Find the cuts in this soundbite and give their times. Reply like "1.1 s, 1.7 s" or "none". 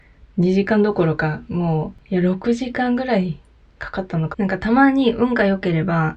4.3 s